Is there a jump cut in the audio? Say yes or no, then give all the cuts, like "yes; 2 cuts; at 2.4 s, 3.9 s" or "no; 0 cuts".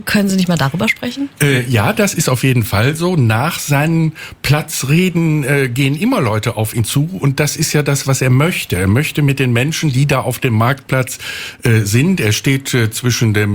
no; 0 cuts